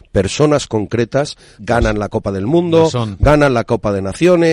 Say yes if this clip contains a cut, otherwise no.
yes